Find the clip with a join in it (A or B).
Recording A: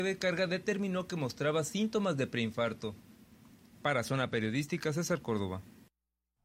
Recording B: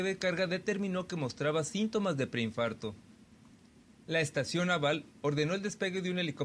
A